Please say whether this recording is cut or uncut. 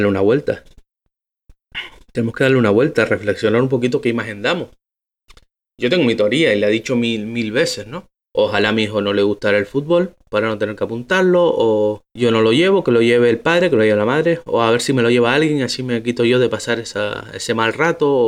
cut